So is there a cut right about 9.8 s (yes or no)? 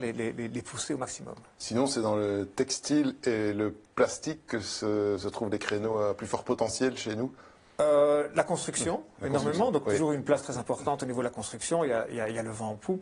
yes